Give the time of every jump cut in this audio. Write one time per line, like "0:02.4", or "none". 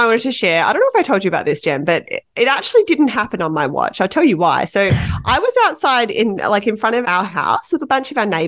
0:07.0